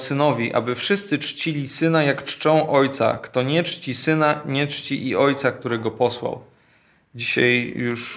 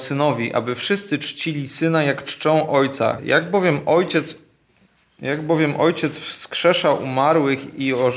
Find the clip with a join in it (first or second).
second